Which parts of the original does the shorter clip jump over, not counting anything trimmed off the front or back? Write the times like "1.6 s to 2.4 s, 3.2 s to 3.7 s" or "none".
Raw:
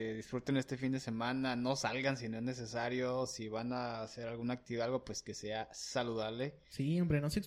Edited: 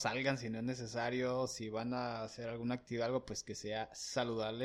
none

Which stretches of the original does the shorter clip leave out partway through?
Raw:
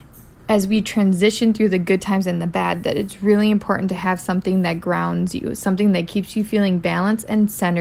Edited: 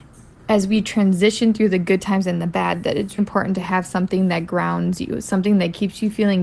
3.2 s to 3.5 s

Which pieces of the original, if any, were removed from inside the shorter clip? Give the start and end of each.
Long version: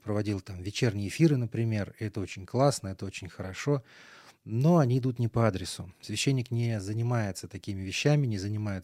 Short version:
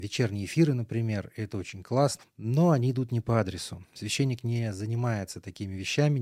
2.8 s to 4.3 s

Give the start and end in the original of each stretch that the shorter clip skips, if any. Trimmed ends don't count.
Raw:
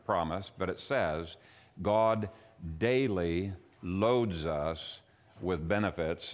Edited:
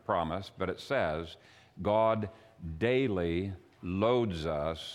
none

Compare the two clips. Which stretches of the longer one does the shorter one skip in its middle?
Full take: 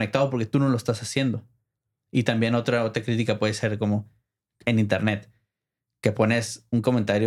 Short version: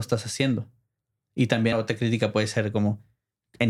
2.5 s to 2.8 s

